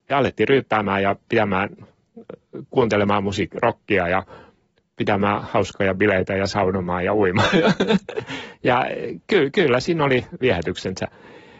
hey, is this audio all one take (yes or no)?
yes